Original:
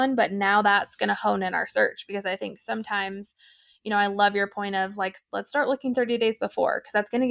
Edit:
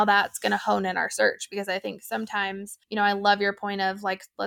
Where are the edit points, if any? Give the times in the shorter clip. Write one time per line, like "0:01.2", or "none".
0:02.8

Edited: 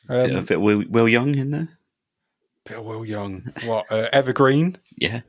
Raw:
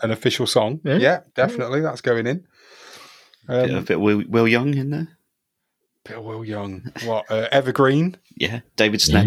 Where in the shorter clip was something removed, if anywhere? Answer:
none

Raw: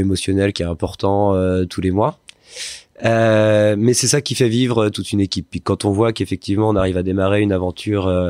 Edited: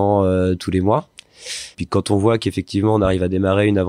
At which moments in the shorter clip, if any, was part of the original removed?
0:01.7

